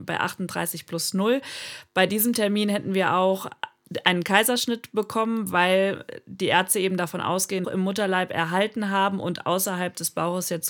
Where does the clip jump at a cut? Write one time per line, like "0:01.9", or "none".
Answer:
0:07.6